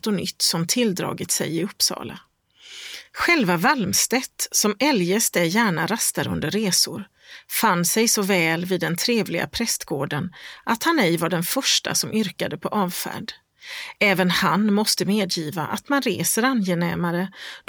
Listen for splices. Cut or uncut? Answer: uncut